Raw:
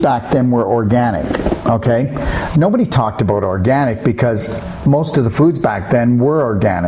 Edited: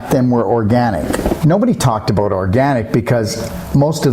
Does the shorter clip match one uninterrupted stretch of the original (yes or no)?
no